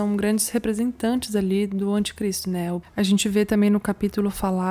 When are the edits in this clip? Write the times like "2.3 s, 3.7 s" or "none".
2.8 s